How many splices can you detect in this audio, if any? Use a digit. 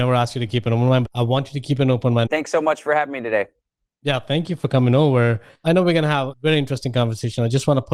2